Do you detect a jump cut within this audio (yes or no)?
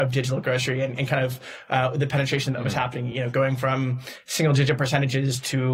no